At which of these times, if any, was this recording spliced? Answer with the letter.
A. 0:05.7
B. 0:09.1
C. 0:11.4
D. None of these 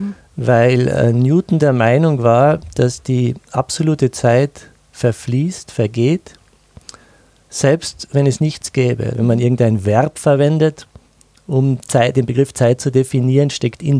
B